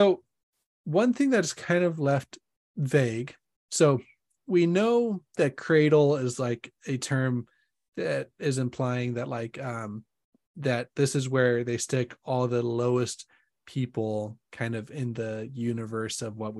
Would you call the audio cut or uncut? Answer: uncut